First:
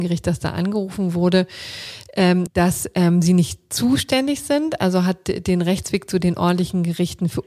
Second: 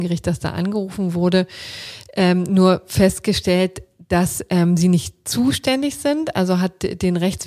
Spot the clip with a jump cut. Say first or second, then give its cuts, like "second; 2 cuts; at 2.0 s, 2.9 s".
first; 1 cut; at 2.5 s